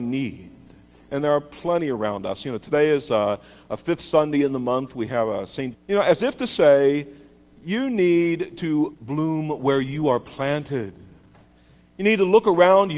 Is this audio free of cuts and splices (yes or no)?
no